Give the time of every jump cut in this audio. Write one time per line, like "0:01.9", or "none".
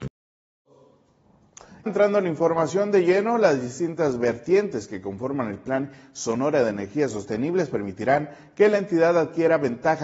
0:01.9